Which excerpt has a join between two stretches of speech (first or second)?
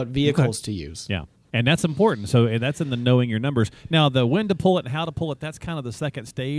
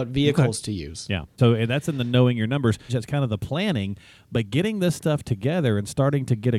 second